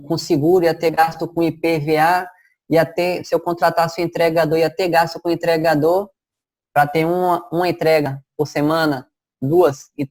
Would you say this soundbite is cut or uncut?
uncut